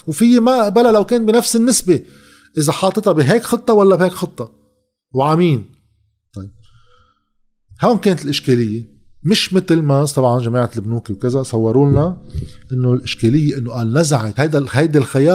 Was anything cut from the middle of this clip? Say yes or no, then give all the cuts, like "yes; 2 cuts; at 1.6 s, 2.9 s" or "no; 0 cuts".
no; 0 cuts